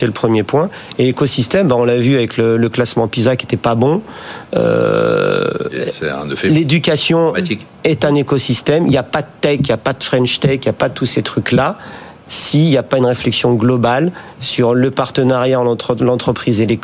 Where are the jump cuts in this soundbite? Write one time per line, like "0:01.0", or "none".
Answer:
none